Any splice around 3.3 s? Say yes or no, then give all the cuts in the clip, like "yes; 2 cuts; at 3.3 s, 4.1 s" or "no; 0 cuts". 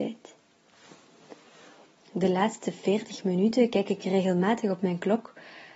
no; 1 cut; at 2.0 s